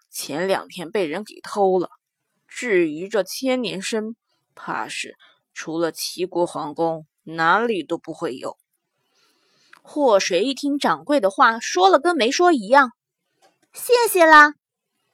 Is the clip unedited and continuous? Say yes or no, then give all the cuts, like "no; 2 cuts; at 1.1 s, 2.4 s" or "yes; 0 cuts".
yes; 0 cuts